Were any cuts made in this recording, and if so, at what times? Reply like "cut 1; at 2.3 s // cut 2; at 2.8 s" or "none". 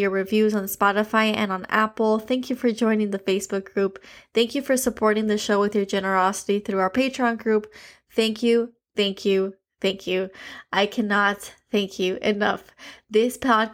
none